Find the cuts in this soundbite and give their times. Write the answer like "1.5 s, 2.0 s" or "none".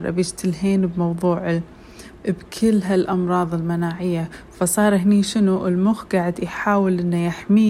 2.2 s